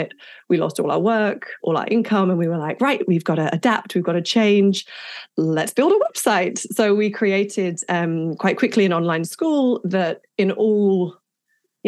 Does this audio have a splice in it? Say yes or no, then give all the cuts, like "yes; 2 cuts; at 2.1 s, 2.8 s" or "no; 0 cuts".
no; 0 cuts